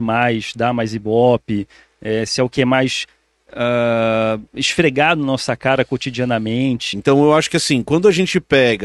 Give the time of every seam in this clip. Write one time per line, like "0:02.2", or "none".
0:06.9